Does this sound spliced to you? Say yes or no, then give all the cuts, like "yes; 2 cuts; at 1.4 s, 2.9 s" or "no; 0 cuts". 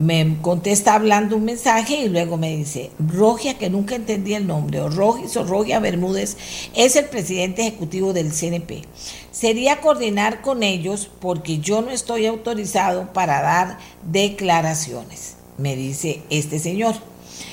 yes; 2 cuts; at 3.0 s, 9.3 s